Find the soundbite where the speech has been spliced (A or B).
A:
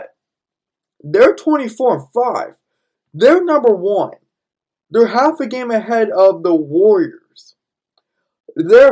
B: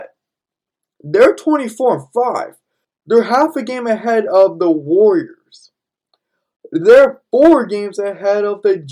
B